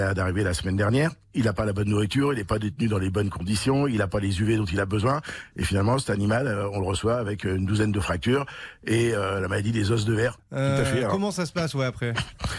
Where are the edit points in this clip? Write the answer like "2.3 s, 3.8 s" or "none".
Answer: 10.4 s